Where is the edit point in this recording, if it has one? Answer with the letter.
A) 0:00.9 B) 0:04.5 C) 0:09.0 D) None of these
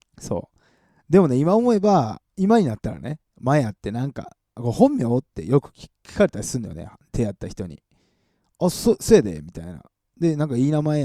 D